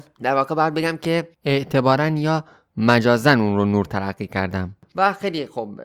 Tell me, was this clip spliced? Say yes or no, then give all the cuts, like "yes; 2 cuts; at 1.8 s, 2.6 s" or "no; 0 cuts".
yes; 1 cut; at 1.3 s